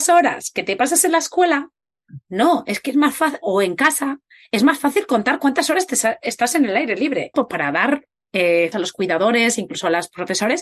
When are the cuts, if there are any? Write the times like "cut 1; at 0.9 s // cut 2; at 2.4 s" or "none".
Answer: cut 1; at 7.3 s // cut 2; at 8.7 s